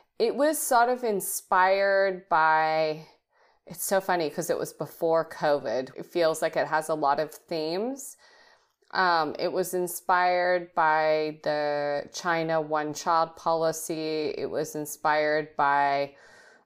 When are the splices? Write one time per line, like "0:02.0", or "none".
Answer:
0:05.9